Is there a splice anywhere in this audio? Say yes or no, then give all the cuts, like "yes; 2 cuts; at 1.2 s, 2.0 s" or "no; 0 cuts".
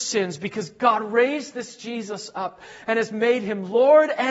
no; 0 cuts